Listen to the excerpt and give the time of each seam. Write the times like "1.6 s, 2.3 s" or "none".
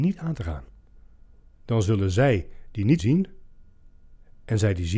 1.6 s, 3.0 s